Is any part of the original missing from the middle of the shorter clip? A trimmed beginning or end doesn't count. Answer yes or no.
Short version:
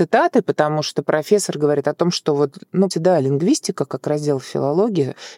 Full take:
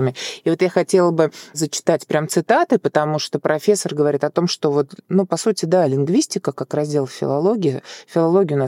yes